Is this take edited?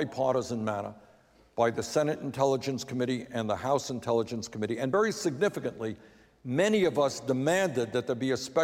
no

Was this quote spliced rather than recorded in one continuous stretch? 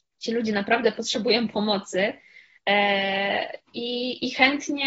no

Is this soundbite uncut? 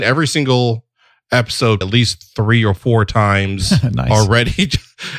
no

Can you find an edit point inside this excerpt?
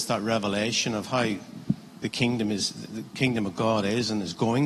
no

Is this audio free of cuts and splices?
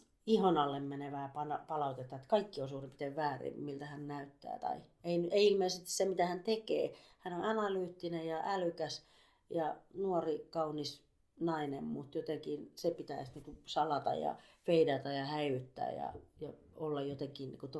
yes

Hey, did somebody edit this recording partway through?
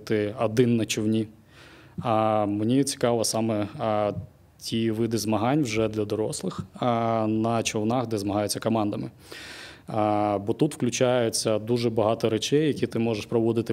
no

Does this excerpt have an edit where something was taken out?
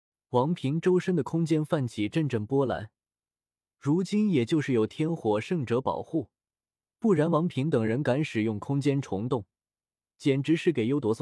yes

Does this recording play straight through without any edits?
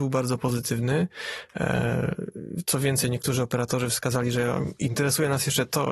yes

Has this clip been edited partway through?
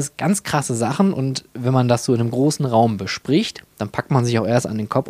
no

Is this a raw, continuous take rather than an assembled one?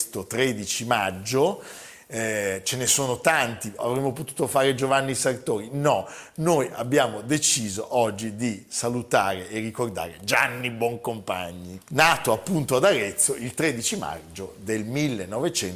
no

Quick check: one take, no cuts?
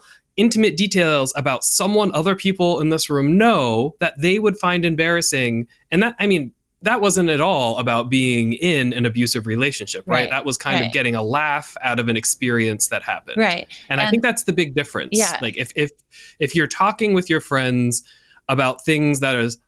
yes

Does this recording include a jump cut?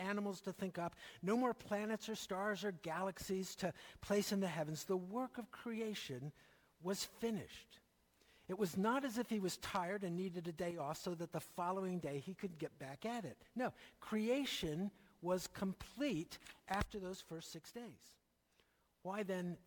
no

